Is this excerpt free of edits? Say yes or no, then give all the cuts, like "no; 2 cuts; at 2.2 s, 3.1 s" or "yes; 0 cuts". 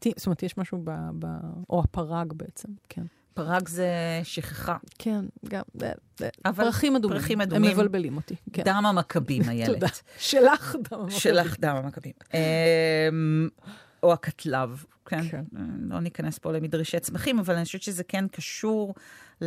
no; 1 cut; at 2.8 s